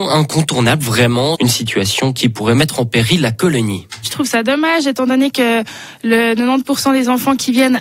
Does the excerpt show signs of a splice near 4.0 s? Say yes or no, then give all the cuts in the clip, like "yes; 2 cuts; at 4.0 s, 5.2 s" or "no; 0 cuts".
no; 1 cut; at 1.4 s